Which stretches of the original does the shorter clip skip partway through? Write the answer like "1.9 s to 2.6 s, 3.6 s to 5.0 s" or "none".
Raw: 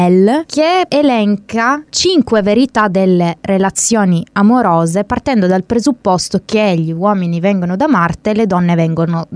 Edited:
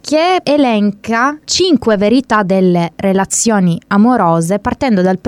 none